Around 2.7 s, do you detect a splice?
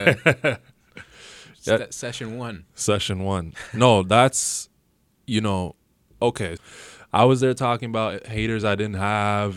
no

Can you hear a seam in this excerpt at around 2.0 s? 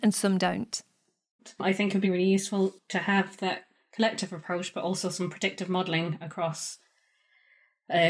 yes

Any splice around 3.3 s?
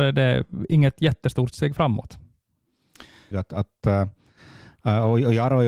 yes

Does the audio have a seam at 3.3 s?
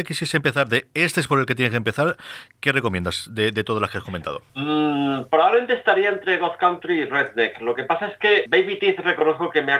no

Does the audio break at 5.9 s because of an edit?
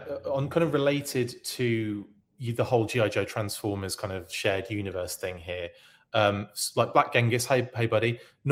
no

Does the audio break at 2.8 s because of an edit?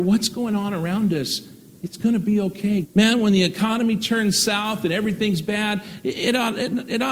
yes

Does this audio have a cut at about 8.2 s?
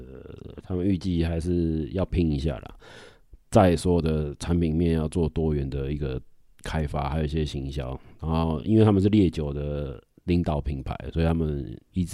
no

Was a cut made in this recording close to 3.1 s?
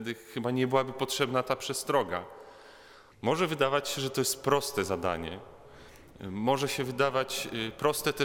yes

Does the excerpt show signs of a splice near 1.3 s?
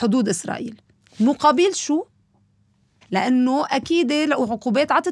no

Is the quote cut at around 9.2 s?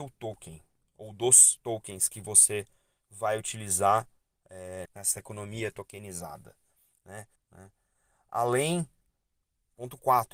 no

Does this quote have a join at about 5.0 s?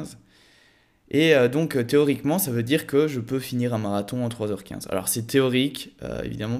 no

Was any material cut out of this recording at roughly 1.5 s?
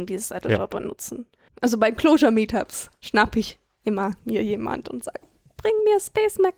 yes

